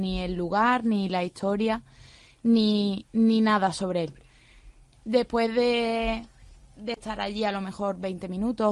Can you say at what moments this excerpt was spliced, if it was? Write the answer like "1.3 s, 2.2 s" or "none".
4.9 s